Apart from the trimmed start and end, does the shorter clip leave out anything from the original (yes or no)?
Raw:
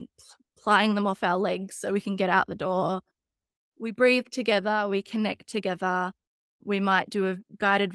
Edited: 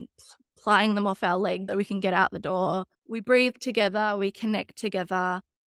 yes